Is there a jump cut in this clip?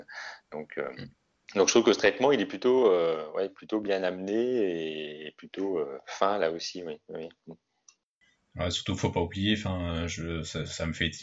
no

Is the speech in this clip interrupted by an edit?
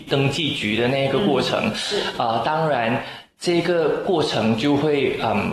no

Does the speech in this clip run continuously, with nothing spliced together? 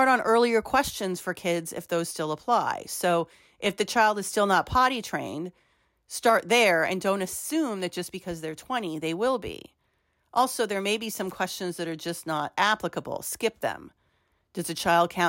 yes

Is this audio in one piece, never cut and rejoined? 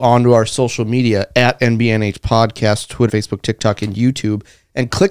no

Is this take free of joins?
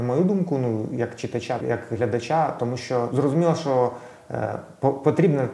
no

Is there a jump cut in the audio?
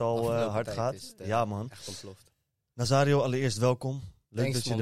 no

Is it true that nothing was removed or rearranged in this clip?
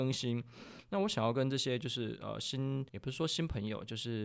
no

